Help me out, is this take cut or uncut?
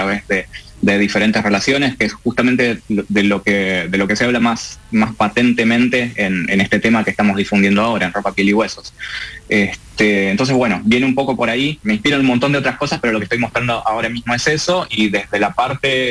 uncut